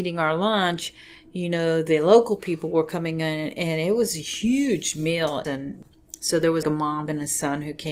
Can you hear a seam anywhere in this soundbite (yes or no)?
yes